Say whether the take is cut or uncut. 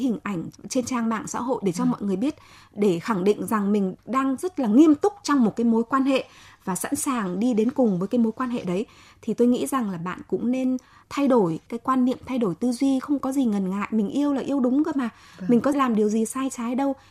uncut